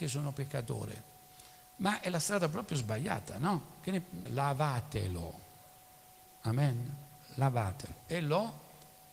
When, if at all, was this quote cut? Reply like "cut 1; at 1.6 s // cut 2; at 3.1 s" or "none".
cut 1; at 4.3 s